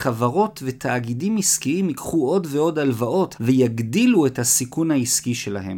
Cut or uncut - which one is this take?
cut